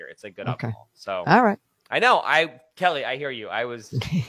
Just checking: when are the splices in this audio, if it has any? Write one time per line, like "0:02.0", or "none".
none